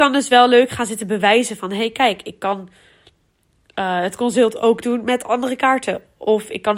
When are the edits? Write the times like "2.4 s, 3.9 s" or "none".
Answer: none